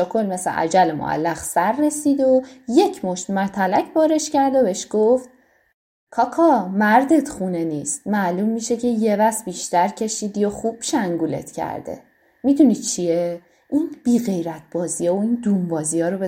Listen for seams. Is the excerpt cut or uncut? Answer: uncut